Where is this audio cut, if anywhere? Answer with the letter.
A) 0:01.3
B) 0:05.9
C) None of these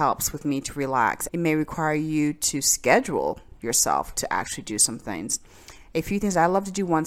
A